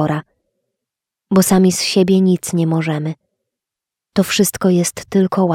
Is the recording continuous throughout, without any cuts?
yes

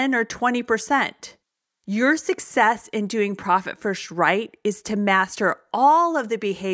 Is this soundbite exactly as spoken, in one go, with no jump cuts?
yes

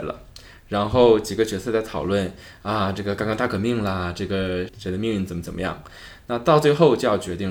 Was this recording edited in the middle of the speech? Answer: yes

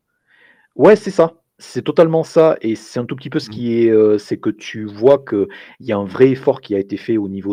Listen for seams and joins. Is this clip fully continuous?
no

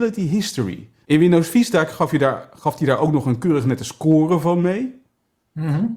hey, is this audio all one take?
no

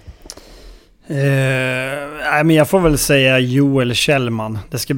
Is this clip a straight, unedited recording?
yes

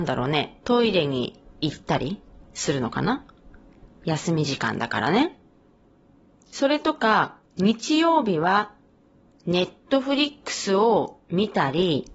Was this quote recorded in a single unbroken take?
no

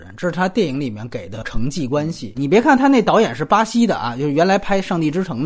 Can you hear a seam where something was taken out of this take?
yes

